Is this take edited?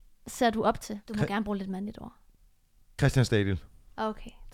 yes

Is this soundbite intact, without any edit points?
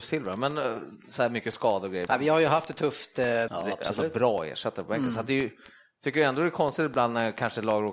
no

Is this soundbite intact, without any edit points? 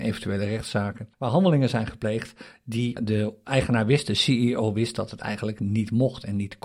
no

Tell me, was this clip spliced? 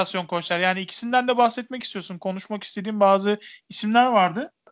no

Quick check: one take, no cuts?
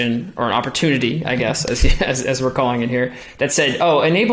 yes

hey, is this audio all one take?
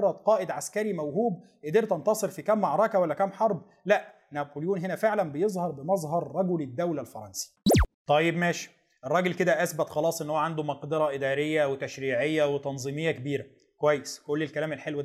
no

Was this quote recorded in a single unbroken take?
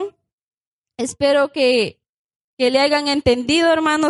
yes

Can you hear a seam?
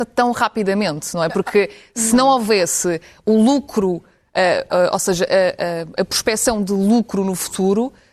no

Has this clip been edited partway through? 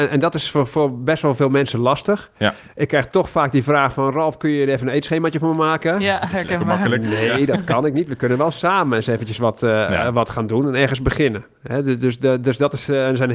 no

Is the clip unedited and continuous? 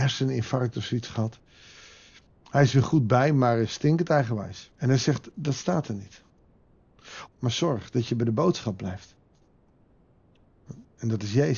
no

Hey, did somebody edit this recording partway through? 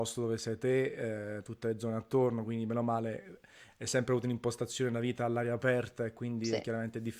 no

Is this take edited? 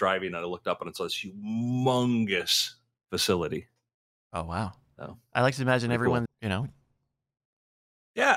yes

